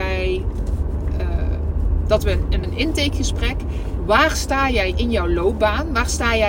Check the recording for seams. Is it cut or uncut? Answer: cut